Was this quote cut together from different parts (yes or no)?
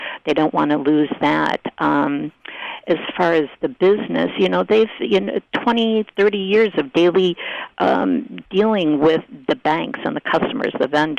no